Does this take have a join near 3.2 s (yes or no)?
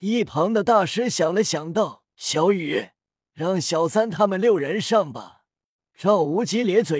yes